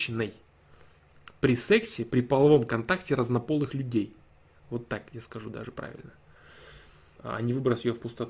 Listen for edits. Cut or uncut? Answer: cut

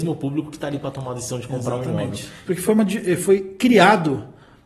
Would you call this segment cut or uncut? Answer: cut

